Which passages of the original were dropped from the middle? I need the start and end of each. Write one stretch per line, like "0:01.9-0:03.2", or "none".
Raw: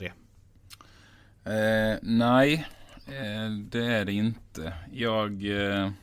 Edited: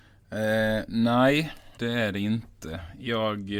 0:02.9-0:03.7